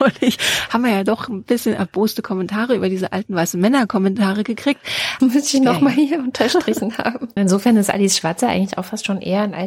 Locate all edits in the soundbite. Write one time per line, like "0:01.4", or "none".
0:05.2
0:07.4